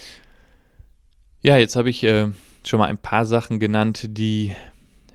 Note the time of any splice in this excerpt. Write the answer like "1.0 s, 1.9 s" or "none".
none